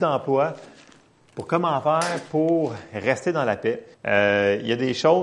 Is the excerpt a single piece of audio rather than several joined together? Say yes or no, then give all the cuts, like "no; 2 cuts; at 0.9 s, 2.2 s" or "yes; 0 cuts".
no; 1 cut; at 3.9 s